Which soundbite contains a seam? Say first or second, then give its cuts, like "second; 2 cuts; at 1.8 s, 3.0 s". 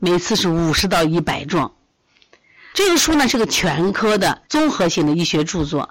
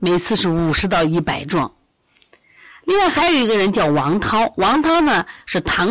first; 2 cuts; at 2.7 s, 4.5 s